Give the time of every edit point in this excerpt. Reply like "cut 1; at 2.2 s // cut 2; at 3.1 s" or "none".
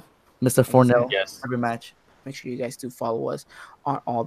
cut 1; at 2.2 s